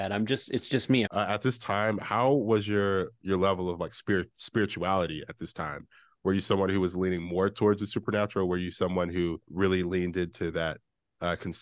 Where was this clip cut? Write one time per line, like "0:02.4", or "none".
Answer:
0:01.1